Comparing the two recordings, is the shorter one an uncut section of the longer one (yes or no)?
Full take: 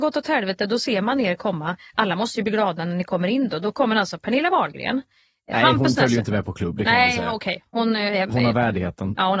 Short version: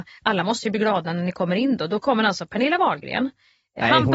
yes